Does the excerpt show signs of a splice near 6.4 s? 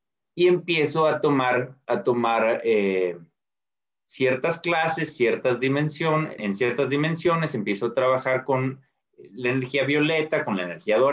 yes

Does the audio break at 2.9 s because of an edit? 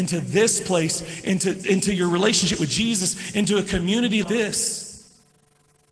no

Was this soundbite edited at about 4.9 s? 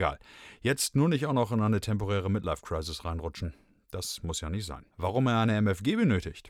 yes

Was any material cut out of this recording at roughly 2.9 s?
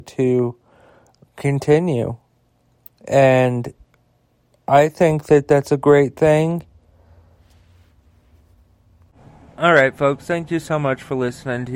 no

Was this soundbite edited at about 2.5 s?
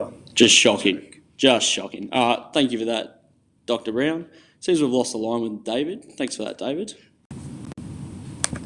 no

